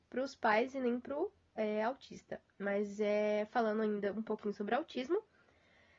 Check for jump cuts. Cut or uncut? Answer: uncut